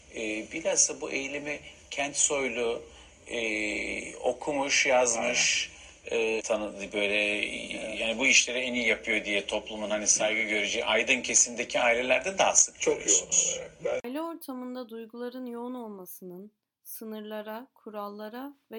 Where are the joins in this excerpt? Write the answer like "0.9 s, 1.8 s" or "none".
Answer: 6.4 s